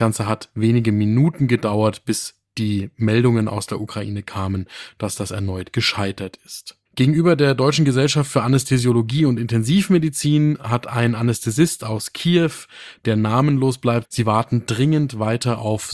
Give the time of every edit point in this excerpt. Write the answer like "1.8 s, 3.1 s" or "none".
6.9 s, 14.0 s